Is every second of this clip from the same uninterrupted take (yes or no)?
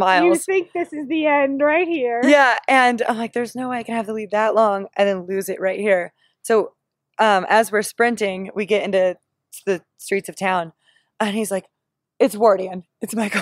yes